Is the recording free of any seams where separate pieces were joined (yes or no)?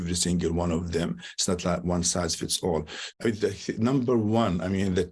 no